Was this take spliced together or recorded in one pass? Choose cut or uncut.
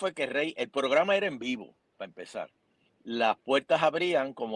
cut